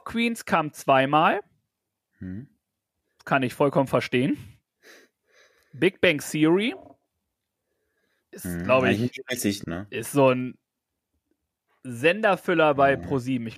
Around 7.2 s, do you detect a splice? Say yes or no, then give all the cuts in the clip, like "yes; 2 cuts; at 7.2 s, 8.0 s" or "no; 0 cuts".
no; 1 cut; at 9.6 s